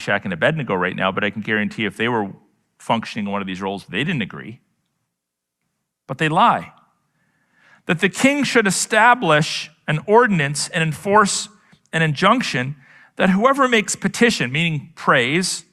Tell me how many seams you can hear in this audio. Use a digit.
0